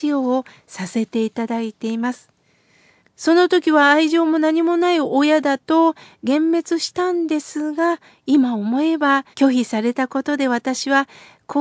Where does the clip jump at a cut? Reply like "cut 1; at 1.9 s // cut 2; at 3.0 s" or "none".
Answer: cut 1; at 3.0 s // cut 2; at 9.3 s

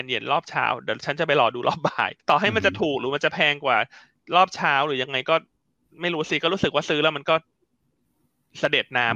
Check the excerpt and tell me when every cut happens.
cut 1; at 2.2 s

